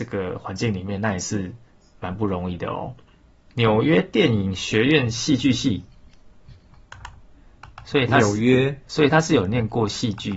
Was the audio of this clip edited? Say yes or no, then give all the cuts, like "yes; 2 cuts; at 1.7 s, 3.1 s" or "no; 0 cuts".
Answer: yes; 1 cut; at 3.5 s